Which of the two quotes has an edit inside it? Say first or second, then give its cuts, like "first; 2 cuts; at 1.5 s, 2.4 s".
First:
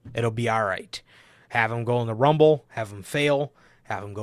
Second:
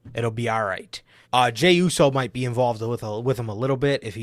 second; 1 cut; at 1.2 s